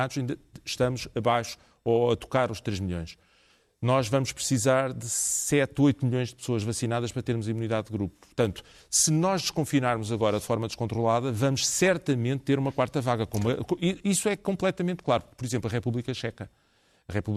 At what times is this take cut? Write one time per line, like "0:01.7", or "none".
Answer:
none